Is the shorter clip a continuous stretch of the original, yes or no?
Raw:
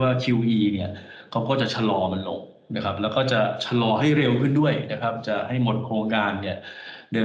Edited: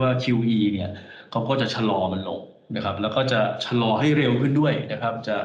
yes